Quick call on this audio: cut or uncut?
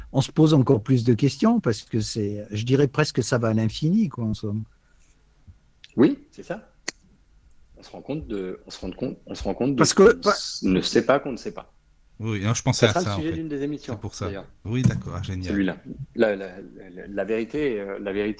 cut